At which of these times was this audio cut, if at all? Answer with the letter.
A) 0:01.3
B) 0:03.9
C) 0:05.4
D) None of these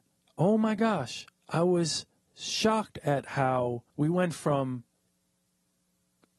B